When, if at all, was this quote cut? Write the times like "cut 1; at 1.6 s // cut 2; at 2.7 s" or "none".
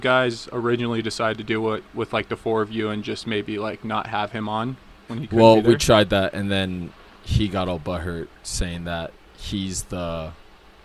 cut 1; at 5.1 s